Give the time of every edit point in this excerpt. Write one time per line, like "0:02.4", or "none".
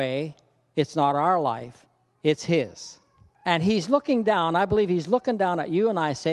0:03.3